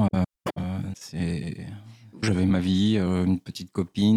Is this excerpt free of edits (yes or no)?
no